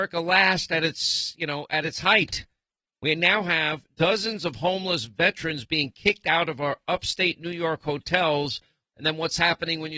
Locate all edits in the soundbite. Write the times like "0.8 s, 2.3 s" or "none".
8.9 s